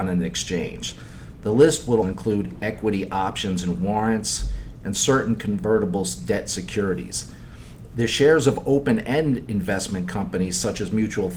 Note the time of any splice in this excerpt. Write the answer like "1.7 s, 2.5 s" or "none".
2.0 s, 4.8 s